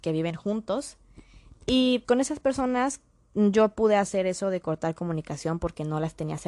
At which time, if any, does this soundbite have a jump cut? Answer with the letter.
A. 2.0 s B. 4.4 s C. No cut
A